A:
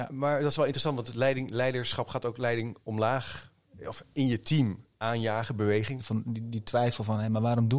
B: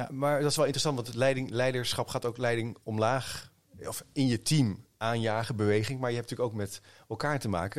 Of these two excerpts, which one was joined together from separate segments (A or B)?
A